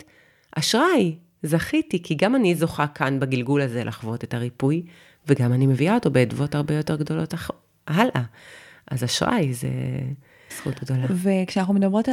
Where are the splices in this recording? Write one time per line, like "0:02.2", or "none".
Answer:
0:10.5

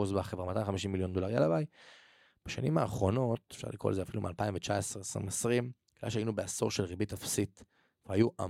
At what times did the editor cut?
none

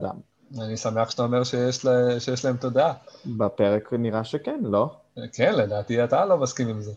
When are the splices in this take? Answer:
none

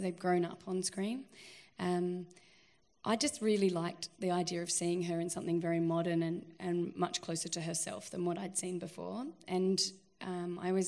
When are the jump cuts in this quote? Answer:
none

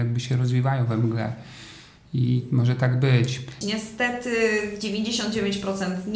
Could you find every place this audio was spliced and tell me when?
0:03.6

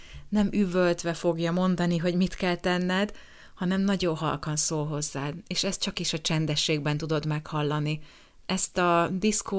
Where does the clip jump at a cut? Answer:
none

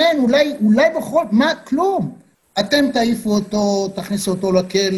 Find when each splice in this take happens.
0:02.4

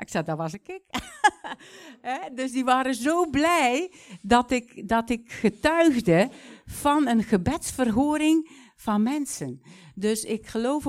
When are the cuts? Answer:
none

